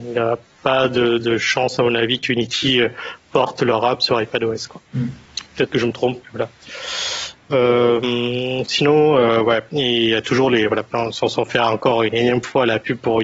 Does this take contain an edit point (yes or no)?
yes